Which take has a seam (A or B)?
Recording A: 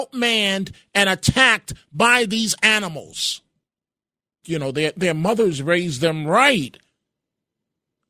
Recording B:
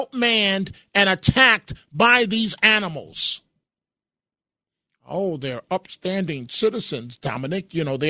A